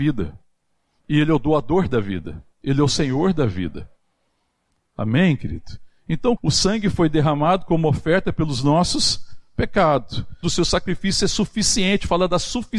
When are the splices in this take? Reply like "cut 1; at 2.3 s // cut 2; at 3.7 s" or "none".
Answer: cut 1; at 6.4 s // cut 2; at 10.4 s